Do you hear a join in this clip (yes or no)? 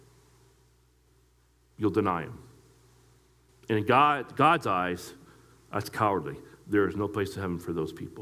no